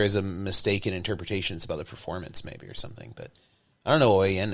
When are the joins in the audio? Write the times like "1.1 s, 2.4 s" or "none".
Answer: none